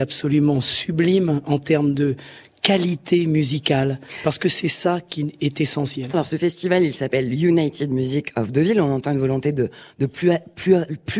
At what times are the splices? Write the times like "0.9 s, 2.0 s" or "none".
6.1 s